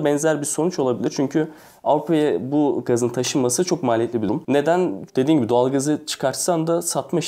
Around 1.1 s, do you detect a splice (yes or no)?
no